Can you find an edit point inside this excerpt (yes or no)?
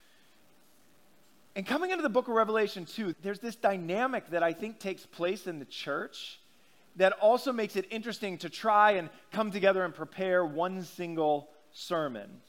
yes